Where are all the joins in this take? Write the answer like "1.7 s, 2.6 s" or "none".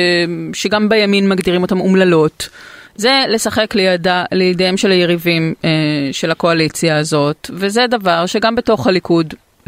2.9 s